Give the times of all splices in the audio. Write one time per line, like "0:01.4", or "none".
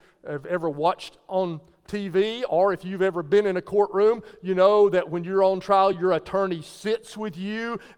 none